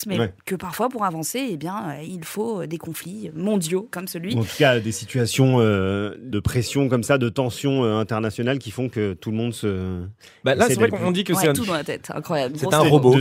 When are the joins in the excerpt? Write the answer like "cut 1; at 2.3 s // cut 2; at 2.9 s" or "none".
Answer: cut 1; at 3.9 s // cut 2; at 11.5 s